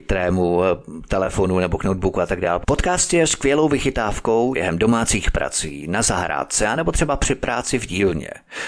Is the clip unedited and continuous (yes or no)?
no